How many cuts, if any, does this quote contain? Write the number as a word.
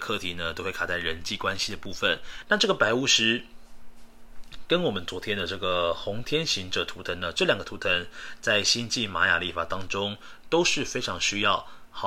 one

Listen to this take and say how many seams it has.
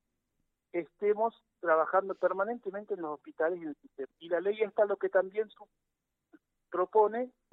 one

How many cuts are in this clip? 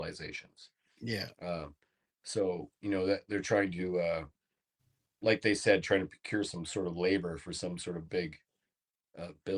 zero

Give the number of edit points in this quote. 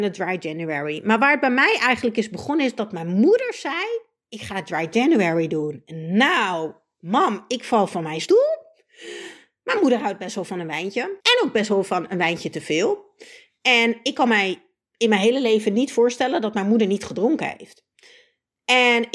one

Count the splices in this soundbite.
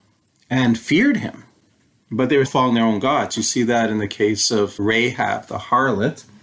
one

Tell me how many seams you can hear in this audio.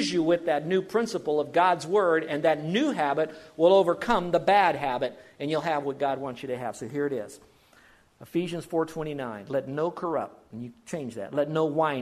zero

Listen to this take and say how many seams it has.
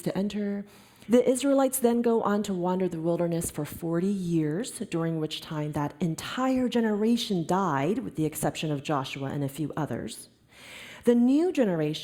one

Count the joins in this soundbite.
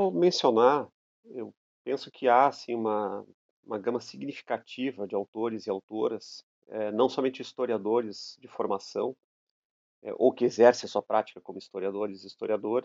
zero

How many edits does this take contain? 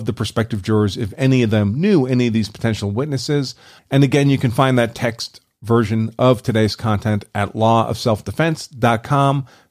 one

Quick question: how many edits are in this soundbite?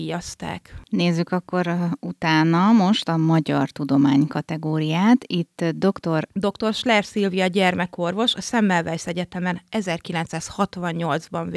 one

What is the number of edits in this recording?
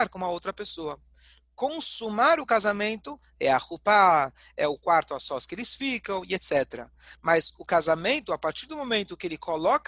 zero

